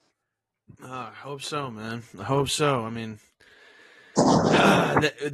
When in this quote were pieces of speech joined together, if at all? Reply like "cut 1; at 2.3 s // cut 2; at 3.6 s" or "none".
none